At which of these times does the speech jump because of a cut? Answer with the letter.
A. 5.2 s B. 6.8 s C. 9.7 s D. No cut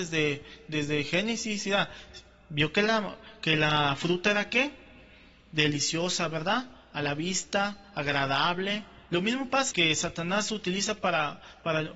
C